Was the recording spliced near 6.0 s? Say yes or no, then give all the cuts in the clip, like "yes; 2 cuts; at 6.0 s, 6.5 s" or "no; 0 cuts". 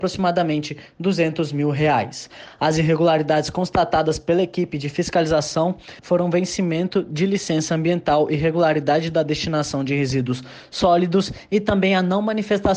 yes; 1 cut; at 6.0 s